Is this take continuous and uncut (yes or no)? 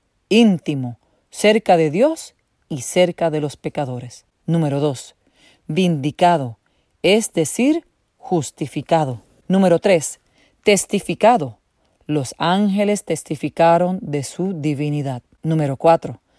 yes